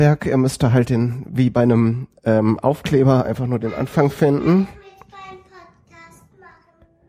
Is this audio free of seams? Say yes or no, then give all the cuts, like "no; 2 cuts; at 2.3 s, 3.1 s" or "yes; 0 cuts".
yes; 0 cuts